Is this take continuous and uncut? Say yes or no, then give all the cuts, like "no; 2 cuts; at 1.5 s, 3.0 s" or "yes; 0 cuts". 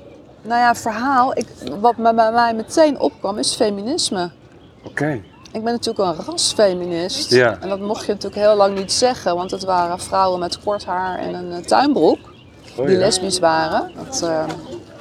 no; 2 cuts; at 12.8 s, 13.9 s